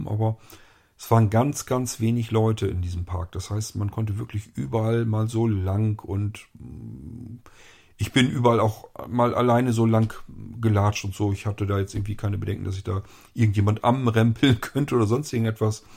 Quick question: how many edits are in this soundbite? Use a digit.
0